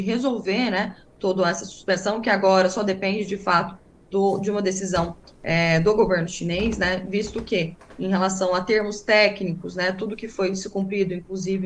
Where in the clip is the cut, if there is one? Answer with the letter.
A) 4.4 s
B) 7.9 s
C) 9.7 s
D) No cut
D